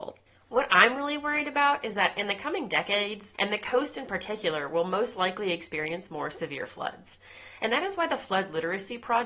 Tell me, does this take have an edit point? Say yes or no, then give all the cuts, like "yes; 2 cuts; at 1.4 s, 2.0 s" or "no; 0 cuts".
yes; 1 cut; at 3.3 s